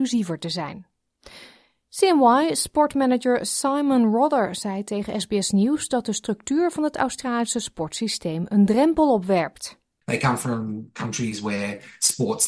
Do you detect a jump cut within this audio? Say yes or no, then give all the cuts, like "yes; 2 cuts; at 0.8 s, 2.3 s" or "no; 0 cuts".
no; 0 cuts